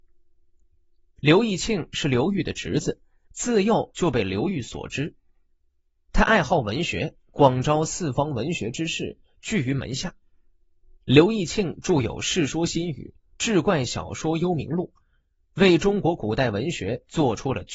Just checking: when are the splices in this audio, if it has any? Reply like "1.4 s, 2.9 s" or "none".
3.3 s